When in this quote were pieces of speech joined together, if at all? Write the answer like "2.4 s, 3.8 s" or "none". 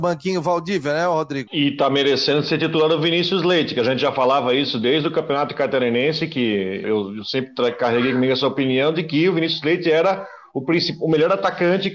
1.5 s, 6.8 s